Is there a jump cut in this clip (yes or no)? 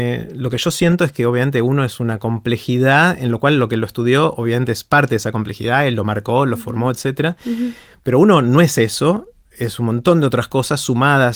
no